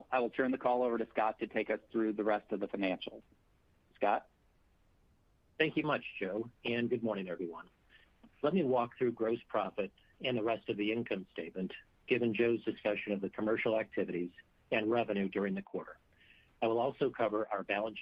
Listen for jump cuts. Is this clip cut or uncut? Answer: cut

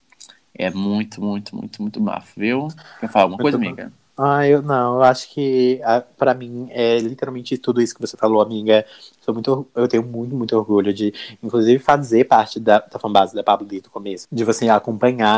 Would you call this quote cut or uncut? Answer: uncut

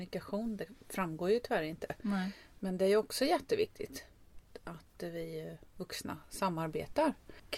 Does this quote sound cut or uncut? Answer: uncut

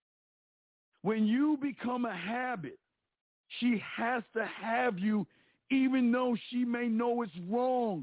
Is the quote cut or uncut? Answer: uncut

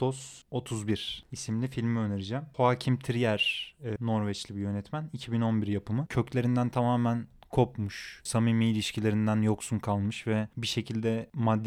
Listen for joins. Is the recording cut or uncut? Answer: cut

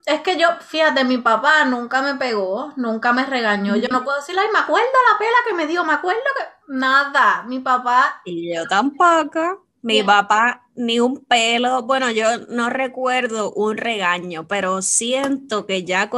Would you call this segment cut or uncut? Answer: uncut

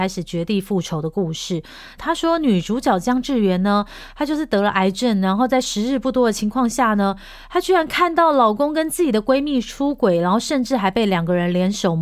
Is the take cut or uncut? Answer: cut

